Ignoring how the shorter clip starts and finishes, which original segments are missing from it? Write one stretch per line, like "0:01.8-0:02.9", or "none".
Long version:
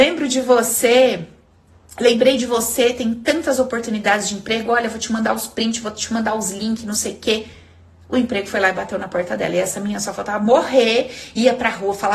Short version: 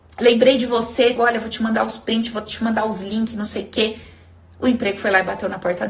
0:03.0-0:04.7